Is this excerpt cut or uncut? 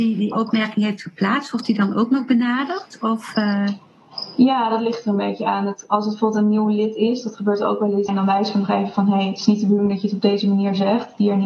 cut